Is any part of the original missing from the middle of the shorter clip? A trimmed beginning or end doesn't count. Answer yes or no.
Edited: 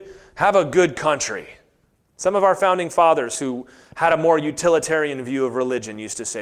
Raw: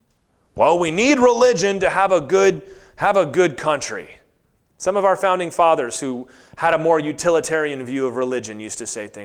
no